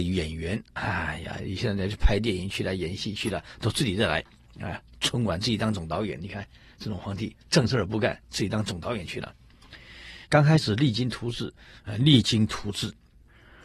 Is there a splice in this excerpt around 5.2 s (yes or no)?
no